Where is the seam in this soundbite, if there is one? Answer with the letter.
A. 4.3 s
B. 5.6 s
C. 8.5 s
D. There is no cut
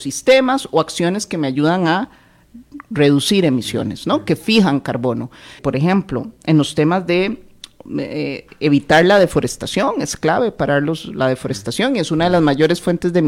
B